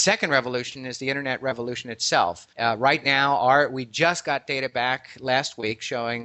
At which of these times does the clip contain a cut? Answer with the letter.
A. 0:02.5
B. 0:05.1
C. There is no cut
A